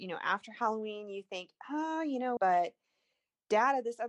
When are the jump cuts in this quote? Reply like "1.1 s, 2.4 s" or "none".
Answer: 2.4 s